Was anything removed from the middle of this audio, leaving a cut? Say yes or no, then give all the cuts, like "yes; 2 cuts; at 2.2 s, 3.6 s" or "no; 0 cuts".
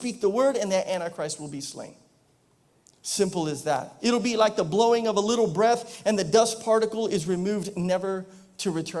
yes; 1 cut; at 4.0 s